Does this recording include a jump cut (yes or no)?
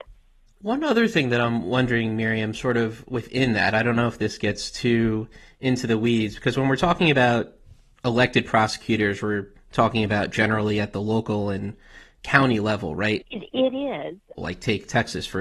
yes